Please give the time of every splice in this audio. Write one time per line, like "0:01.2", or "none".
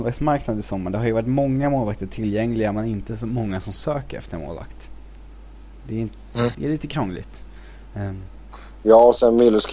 0:06.5